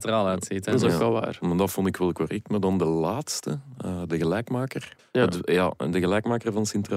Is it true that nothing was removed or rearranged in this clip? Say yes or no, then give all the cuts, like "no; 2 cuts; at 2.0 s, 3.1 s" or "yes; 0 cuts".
no; 1 cut; at 5.0 s